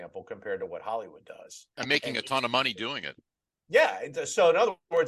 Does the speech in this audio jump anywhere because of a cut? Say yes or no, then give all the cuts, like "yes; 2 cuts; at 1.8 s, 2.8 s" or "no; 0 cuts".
no; 0 cuts